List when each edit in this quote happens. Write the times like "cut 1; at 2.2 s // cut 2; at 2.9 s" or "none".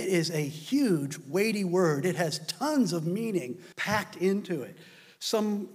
cut 1; at 3.7 s